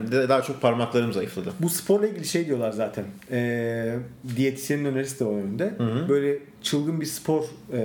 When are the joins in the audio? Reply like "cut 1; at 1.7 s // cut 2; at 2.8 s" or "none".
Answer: none